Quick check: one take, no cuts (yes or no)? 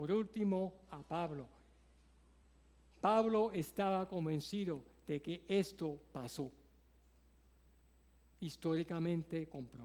yes